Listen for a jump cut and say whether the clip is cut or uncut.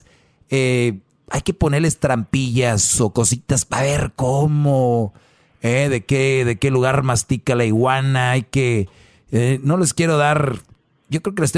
uncut